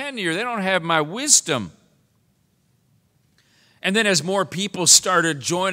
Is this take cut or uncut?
uncut